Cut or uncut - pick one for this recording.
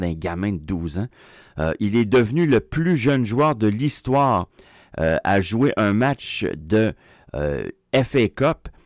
uncut